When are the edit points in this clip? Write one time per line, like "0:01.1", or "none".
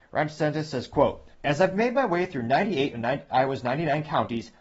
0:01.3